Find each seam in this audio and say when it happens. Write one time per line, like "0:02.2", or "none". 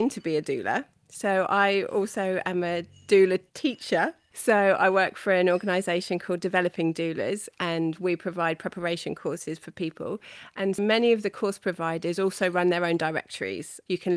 0:10.8